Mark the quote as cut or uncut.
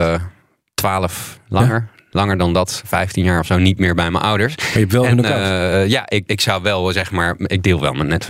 cut